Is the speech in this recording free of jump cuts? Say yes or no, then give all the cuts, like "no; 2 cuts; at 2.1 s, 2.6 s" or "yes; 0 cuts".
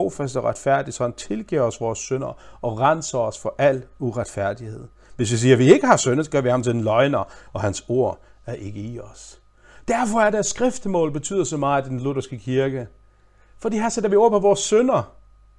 yes; 0 cuts